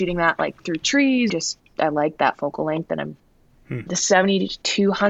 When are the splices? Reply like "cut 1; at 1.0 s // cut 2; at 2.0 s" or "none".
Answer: cut 1; at 1.3 s // cut 2; at 3.9 s